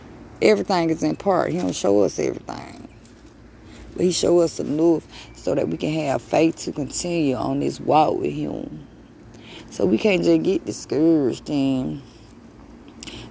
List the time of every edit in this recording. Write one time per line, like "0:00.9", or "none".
none